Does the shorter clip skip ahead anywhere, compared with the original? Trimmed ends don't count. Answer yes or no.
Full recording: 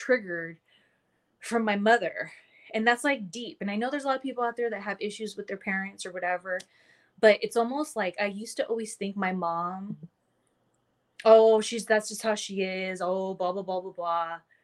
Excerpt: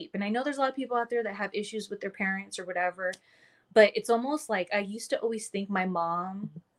no